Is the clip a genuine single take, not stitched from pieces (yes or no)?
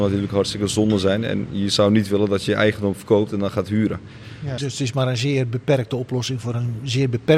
no